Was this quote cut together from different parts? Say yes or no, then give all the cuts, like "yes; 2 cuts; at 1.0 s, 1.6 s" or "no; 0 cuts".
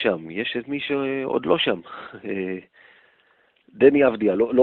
no; 0 cuts